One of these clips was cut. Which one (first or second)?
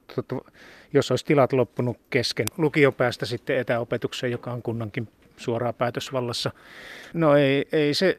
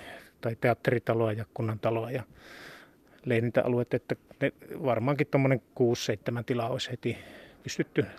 first